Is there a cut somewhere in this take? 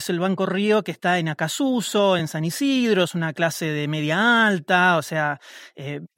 no; 0 cuts

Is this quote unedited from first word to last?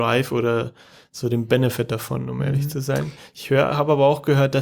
yes; 0 cuts

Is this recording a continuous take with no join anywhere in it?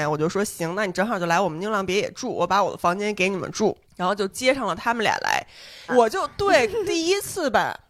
no; 2 cuts; at 3.8 s, 5.9 s

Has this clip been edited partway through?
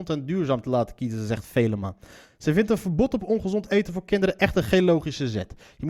no; 0 cuts

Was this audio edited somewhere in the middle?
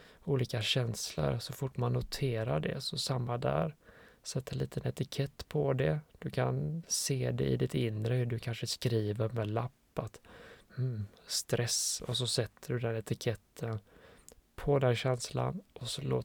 no; 0 cuts

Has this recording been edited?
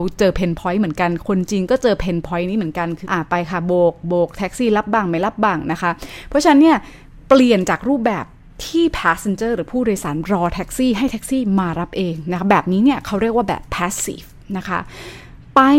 yes; 1 cut; at 3.0 s

